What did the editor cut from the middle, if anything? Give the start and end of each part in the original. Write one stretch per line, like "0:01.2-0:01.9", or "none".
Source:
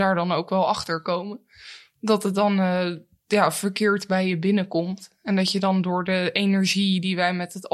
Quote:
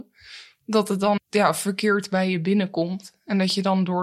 0:02.5-0:03.1